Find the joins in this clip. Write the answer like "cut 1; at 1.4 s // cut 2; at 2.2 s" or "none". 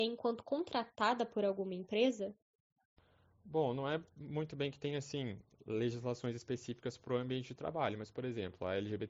none